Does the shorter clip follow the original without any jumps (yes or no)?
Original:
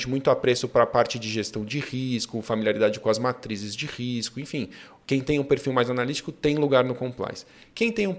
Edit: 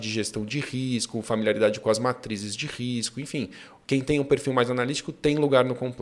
yes